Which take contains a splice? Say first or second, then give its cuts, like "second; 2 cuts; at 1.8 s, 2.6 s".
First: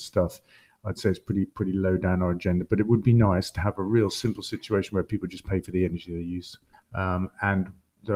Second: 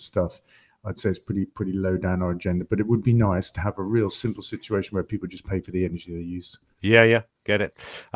first; 1 cut; at 6.7 s